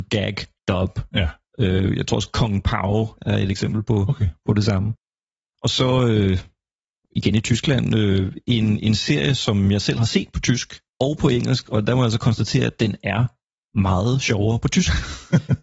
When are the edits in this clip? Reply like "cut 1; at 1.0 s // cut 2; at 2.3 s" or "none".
cut 1; at 3.2 s